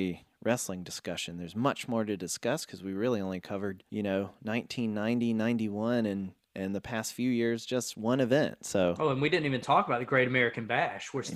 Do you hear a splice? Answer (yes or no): no